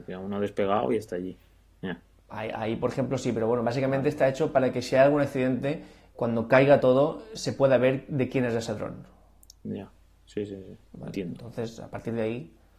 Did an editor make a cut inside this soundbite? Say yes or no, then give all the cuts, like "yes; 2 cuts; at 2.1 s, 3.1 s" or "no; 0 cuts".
no; 0 cuts